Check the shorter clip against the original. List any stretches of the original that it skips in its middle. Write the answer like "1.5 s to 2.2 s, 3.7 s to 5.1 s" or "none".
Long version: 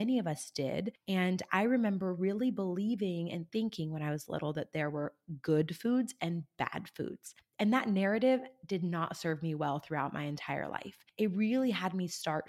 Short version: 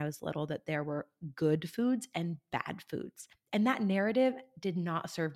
none